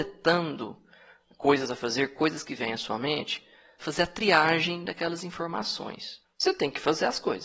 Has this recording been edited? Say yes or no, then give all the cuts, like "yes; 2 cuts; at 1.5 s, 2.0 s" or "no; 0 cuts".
yes; 2 cuts; at 3.8 s, 6.2 s